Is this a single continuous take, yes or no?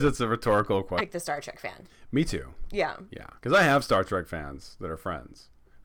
no